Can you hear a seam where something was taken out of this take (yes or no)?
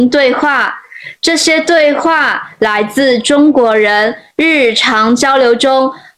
no